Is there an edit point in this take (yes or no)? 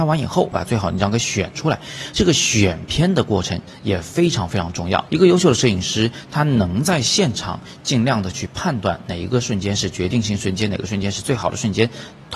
yes